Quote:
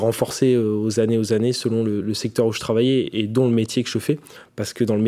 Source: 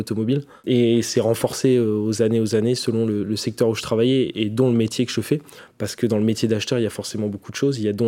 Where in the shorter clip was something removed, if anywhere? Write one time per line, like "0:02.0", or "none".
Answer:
none